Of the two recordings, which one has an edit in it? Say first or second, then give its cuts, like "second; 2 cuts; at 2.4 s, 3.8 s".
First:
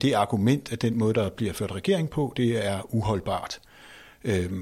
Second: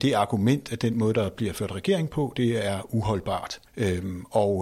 second; 1 cut; at 3.7 s